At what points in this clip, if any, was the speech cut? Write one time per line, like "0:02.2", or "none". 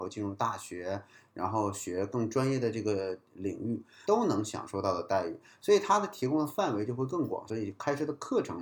0:04.0
0:07.5